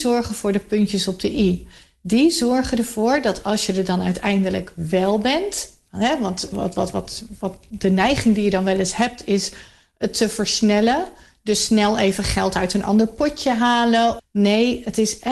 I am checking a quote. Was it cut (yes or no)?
yes